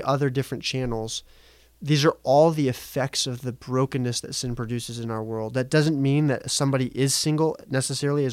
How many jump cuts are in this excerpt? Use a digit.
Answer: 0